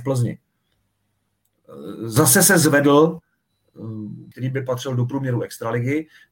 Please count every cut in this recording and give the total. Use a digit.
1